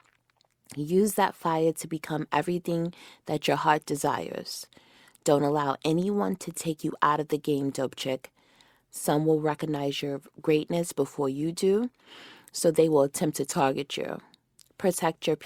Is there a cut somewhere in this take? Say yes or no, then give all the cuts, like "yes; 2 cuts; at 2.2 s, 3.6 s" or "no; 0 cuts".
no; 0 cuts